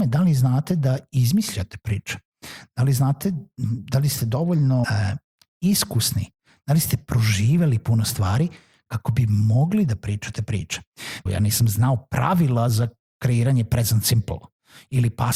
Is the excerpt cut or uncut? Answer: cut